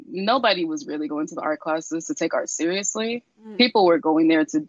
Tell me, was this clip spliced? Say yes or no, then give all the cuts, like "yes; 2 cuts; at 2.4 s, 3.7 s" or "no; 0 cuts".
no; 0 cuts